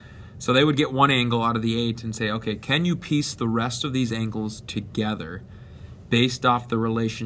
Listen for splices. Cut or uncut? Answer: uncut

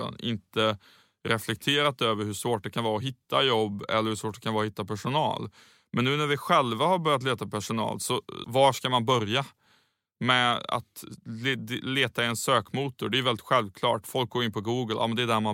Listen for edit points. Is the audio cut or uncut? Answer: cut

